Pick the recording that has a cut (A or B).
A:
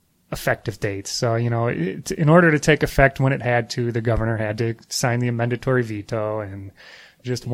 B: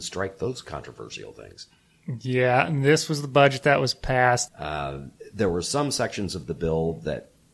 B